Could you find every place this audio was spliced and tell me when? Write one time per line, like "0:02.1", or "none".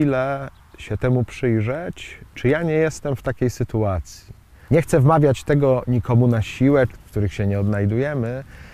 0:04.7
0:06.9